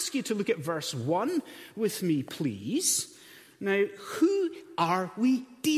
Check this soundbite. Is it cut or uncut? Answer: uncut